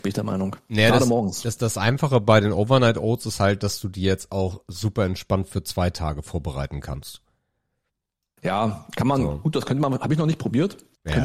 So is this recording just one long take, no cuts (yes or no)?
yes